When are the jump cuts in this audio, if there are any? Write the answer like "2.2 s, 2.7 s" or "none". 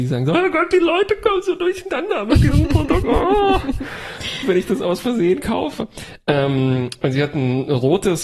4.4 s